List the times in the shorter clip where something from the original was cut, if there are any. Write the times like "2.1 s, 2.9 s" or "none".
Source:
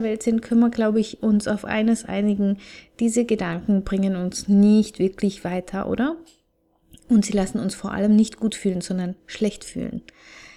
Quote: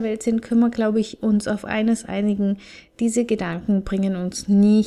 none